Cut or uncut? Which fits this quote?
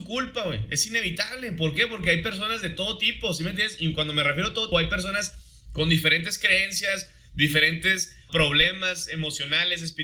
cut